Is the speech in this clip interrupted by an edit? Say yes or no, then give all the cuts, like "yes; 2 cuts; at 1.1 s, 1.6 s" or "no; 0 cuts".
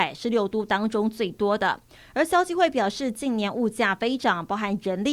no; 0 cuts